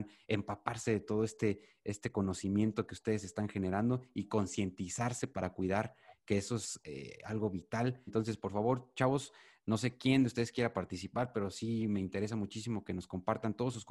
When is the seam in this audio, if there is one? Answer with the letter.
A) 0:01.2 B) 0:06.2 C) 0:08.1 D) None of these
C